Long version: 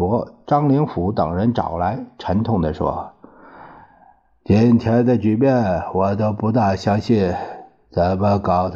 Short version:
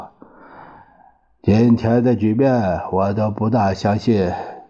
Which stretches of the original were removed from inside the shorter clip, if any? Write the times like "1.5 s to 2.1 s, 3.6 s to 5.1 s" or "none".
none